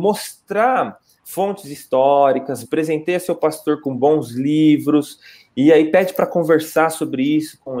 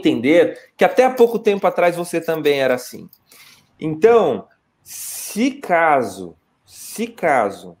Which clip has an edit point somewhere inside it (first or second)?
first